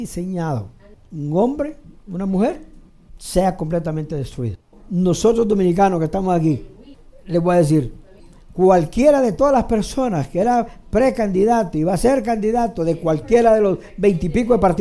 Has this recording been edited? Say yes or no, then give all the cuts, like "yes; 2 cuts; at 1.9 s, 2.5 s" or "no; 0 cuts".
yes; 1 cut; at 4.7 s